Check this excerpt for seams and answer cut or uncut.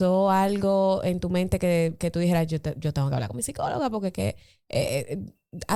uncut